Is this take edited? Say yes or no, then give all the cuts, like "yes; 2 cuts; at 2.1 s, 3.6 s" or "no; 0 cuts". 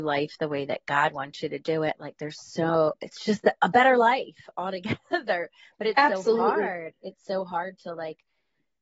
no; 0 cuts